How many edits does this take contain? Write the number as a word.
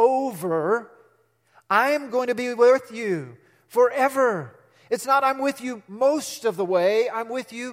zero